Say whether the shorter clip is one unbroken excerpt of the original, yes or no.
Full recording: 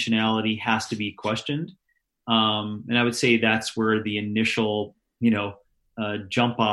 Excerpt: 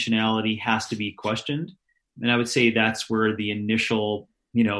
no